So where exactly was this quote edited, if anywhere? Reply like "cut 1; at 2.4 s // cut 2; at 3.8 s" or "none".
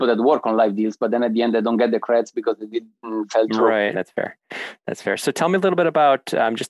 cut 1; at 3.9 s